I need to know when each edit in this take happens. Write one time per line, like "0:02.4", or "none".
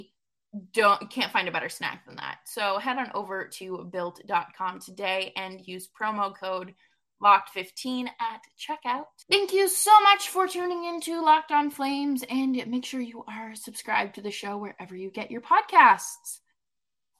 0:09.2